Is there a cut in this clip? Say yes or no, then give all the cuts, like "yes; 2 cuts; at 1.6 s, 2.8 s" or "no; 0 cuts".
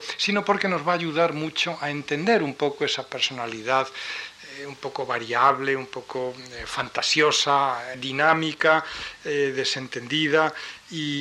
yes; 1 cut; at 7.9 s